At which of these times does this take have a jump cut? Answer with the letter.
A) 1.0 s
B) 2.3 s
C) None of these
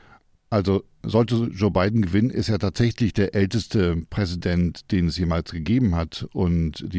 A